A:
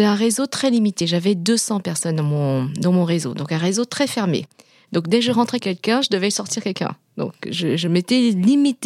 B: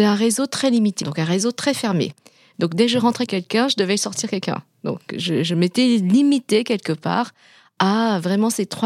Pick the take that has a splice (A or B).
B